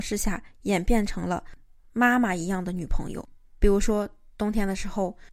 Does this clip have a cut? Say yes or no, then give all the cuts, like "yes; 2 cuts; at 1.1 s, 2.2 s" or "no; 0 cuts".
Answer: no; 0 cuts